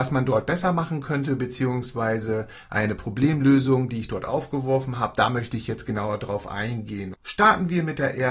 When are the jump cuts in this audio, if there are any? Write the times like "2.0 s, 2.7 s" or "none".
7.1 s